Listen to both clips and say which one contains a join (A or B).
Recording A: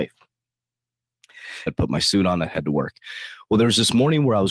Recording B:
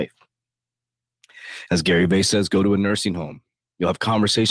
A